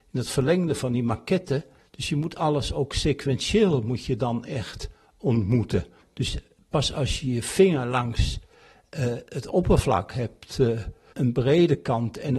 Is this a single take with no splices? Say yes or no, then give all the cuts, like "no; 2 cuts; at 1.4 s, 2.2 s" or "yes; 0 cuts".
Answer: no; 1 cut; at 11.1 s